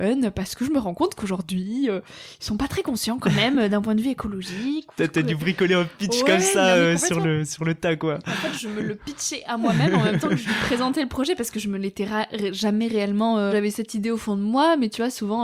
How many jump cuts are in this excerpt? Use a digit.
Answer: 1